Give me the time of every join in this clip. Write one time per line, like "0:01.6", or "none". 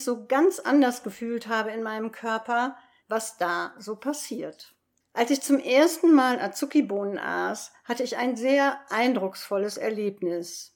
0:03.0